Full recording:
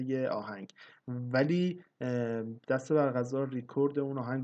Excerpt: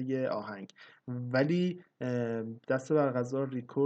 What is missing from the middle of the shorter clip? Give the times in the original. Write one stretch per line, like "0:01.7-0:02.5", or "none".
none